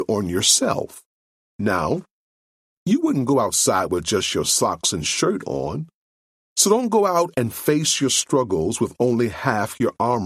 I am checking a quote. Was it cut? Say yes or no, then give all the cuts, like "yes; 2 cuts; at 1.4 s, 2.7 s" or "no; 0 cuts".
no; 0 cuts